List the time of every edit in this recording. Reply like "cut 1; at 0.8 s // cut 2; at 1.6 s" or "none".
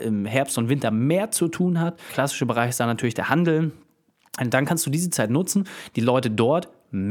none